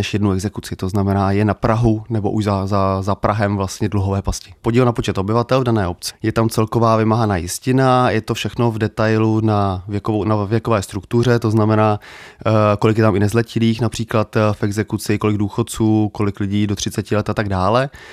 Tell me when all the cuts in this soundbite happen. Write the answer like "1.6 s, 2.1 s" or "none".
4.6 s, 6.1 s